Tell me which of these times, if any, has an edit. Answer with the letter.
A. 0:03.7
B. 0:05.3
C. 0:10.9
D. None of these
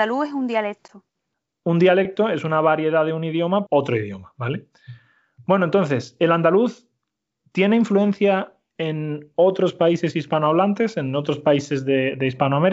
A